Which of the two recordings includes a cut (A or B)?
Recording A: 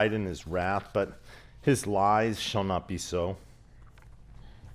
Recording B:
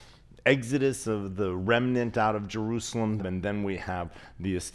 B